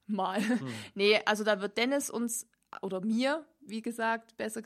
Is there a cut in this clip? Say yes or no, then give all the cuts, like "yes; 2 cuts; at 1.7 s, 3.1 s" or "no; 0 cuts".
no; 0 cuts